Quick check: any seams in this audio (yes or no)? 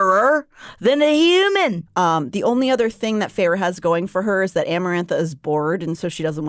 yes